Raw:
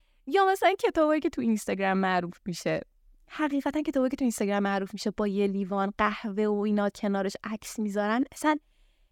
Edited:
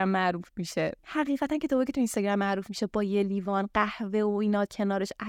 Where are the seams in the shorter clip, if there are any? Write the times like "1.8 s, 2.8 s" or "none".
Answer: 1.0 s